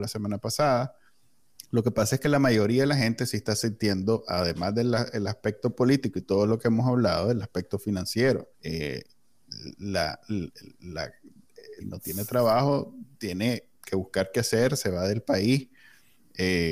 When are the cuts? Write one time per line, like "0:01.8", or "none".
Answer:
0:01.6
0:08.5
0:11.8